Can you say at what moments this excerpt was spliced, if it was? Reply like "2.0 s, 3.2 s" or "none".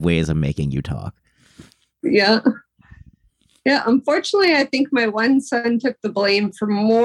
none